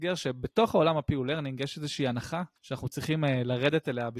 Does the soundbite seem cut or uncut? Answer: cut